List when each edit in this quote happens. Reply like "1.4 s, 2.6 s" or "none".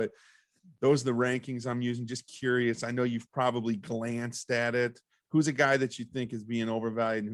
none